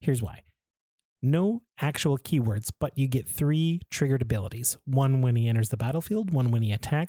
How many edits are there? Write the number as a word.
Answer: zero